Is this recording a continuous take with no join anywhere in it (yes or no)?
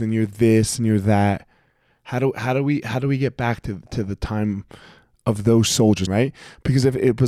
no